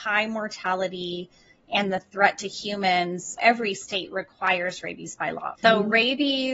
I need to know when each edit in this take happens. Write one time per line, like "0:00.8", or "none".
0:03.4
0:05.6